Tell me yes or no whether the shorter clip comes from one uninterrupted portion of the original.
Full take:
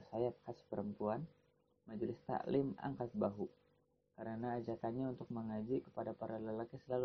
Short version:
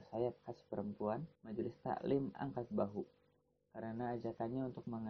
no